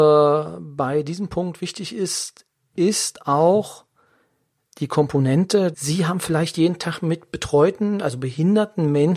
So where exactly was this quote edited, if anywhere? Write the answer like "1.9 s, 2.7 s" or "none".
5.7 s